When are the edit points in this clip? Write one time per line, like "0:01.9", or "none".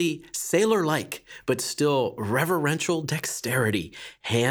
none